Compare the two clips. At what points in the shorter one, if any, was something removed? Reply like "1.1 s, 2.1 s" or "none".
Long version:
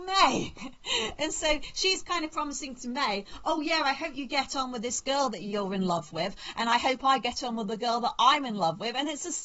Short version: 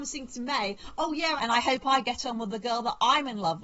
1.4 s